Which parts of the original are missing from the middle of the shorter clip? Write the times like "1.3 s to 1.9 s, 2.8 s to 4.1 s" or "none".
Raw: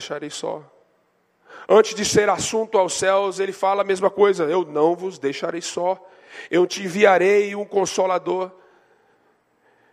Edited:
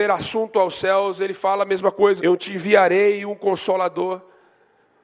4.4 s to 6.5 s

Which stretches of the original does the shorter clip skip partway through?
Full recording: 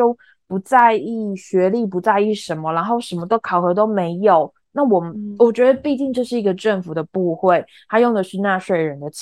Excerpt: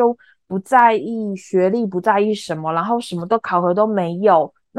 none

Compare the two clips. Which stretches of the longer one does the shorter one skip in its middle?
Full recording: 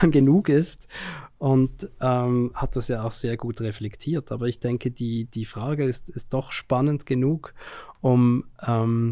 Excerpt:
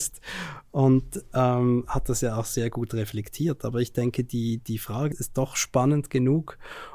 5.8 s to 6.1 s

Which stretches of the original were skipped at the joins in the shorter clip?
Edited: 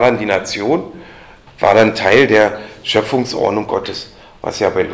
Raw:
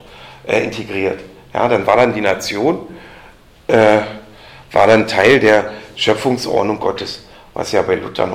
3.4 s to 4.6 s

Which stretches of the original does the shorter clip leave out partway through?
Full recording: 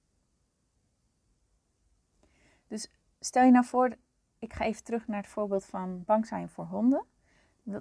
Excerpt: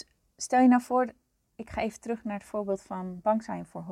none

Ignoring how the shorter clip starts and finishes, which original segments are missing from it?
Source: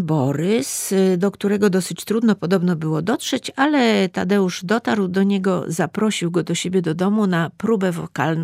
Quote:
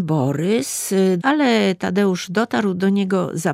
1.2 s to 3.5 s

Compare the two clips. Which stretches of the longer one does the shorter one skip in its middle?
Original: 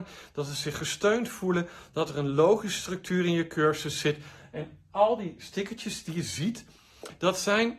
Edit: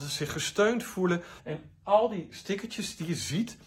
1.8 s to 4.5 s

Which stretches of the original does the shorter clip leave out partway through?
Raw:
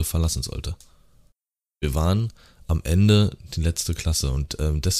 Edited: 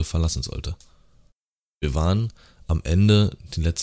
none

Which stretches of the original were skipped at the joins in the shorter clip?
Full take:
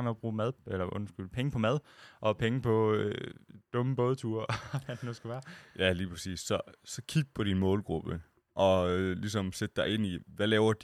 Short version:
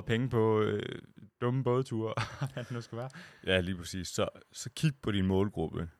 none

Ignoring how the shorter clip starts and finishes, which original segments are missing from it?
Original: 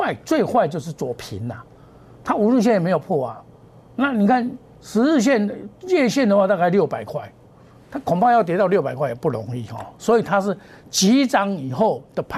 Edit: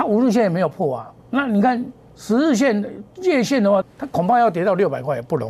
3.5 s to 3.9 s, 6.5 s to 7.7 s

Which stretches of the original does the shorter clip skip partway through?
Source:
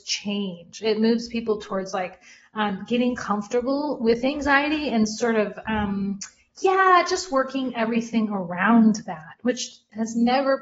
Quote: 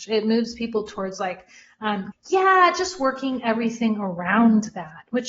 2.9 s to 6.4 s

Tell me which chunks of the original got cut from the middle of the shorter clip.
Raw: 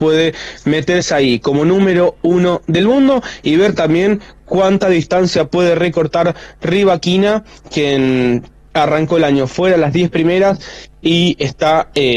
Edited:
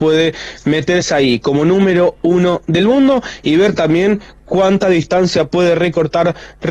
none

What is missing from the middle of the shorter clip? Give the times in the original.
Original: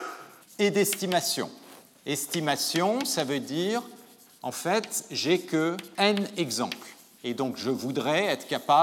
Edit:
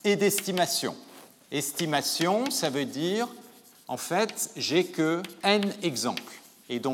none

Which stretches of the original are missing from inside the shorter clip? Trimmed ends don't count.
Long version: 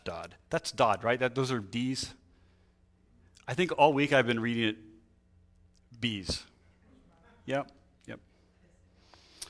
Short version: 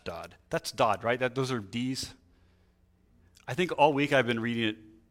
none

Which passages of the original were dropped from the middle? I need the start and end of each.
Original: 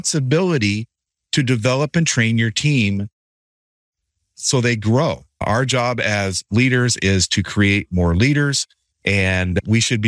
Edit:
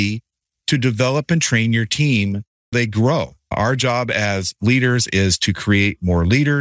3.4 s to 4.6 s

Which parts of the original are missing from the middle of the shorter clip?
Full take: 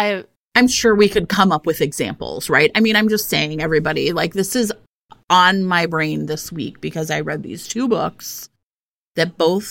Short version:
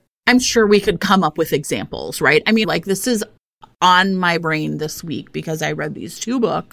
2.9 s to 4.1 s

